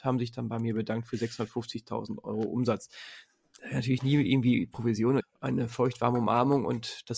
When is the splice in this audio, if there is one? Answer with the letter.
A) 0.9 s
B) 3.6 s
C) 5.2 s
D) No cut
C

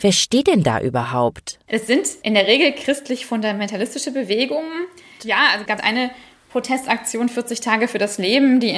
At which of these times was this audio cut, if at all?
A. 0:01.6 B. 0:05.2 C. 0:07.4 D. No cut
B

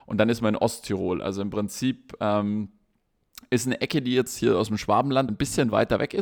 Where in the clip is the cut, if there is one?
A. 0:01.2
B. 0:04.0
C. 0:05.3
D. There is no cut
C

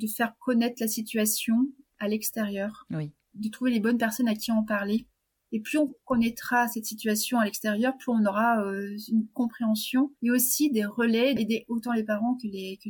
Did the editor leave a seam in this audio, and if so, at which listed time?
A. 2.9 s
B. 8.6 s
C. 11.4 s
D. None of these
C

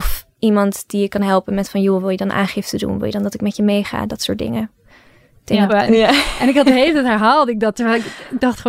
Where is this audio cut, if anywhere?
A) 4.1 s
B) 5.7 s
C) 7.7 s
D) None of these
B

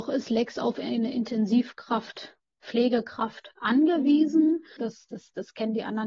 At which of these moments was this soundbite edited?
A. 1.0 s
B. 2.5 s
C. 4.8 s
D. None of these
C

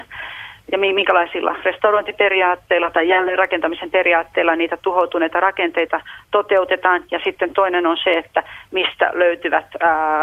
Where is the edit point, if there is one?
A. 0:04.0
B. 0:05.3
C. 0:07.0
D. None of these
D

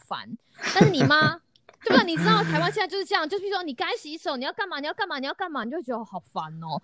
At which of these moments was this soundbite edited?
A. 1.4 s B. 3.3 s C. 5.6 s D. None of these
D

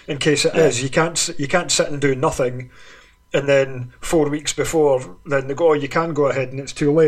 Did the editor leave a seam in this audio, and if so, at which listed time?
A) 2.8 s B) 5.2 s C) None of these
C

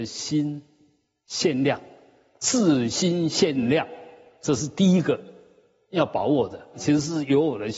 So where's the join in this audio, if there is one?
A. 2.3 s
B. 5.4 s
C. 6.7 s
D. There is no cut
C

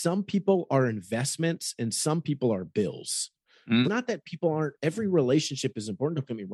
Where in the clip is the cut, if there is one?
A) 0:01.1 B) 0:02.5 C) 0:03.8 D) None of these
C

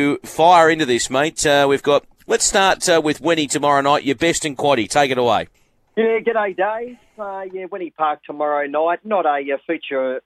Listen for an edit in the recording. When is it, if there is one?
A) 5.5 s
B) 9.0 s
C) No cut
C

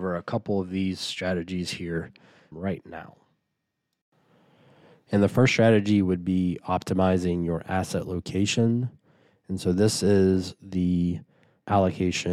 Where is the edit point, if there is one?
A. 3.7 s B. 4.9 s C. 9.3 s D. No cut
D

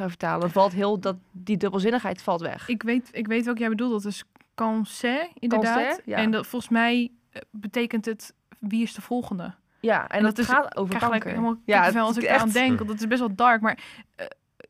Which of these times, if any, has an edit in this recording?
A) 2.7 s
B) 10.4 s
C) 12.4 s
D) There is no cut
D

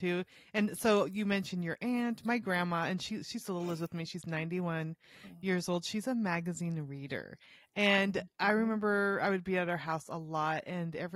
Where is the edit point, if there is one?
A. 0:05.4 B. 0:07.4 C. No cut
C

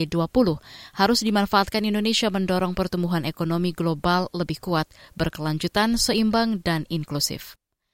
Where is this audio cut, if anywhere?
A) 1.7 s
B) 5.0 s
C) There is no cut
C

